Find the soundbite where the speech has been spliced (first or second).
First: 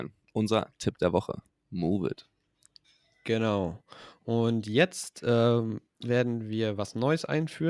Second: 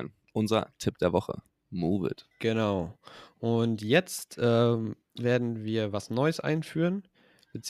second